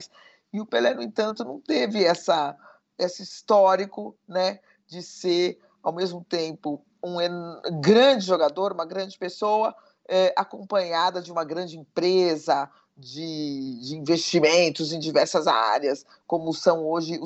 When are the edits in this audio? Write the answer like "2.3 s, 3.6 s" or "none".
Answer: none